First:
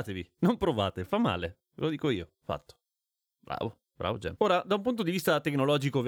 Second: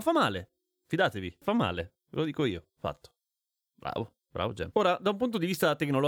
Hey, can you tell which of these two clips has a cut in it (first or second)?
second